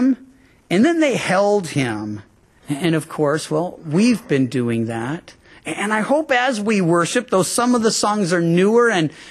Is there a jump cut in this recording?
yes; 1 cut; at 2.5 s

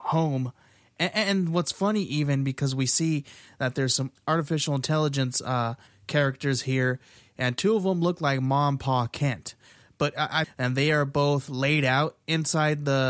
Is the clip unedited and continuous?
no; 1 cut; at 10.4 s

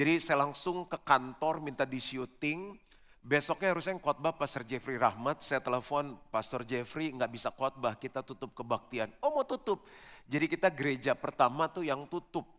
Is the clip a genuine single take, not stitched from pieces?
yes; 0 cuts

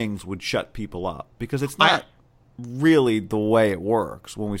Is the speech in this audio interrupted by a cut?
no; 0 cuts

